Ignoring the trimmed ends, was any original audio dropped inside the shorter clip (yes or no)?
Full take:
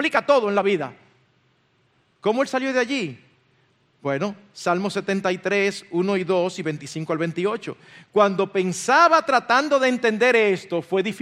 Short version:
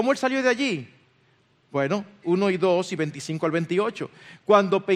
yes